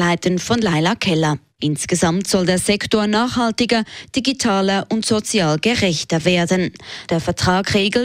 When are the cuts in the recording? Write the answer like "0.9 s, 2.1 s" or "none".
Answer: 1.6 s, 7.1 s